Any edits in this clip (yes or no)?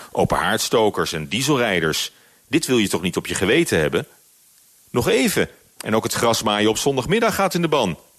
no